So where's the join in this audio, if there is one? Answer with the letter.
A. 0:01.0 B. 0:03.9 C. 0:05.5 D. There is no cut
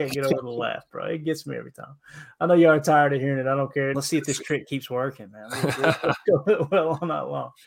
B